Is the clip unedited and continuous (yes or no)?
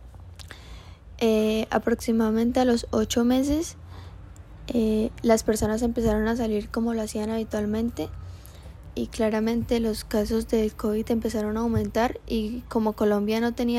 yes